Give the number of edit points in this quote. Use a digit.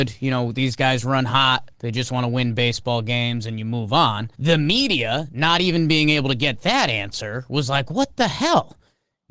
1